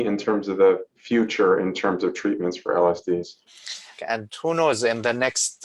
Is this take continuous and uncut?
no; 1 cut; at 4.0 s

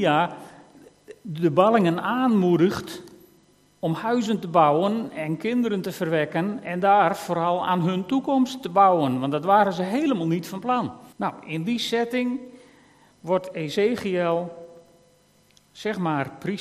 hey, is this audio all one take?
no; 1 cut; at 11.1 s

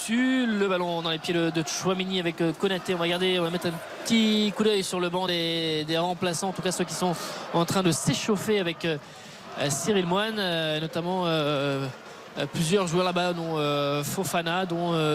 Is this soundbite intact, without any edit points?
yes; 0 cuts

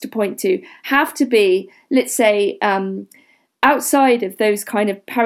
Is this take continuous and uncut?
yes; 0 cuts

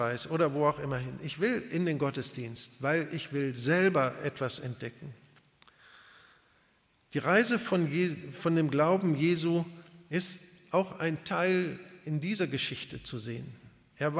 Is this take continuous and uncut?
yes; 0 cuts

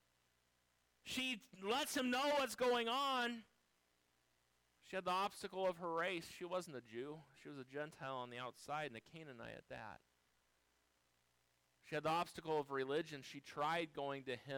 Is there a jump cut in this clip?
no; 0 cuts

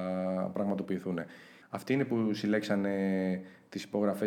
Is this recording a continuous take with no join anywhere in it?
no; 1 cut; at 1.6 s

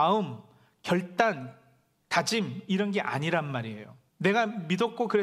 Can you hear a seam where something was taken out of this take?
yes; 1 cut; at 4.1 s

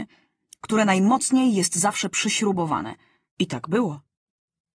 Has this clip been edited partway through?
yes; 1 cut; at 3.3 s

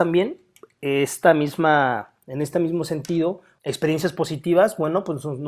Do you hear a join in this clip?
yes; 2 cuts; at 2.2 s, 3.6 s

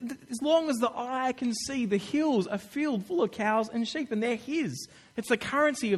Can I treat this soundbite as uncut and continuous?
yes; 0 cuts

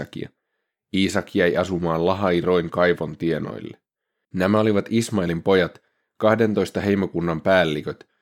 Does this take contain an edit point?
yes; 1 cut; at 4.2 s

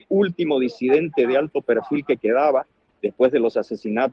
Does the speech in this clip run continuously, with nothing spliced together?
yes; 0 cuts

